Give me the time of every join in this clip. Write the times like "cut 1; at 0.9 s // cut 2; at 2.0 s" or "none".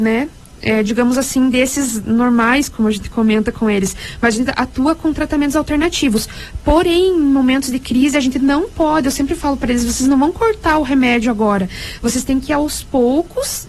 none